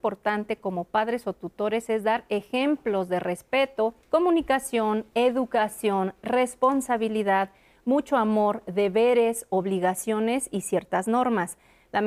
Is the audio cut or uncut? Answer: cut